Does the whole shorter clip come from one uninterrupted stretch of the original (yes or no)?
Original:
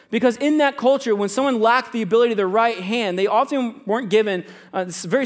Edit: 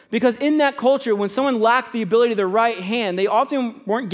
yes